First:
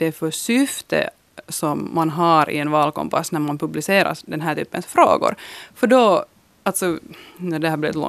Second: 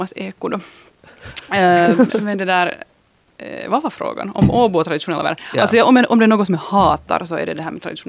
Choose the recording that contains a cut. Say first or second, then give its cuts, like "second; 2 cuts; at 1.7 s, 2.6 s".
second; 1 cut; at 2.1 s